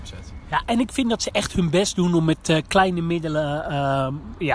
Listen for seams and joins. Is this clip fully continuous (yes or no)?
yes